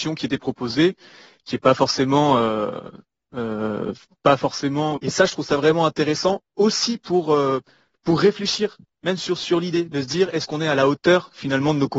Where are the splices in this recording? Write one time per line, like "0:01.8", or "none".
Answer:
0:05.0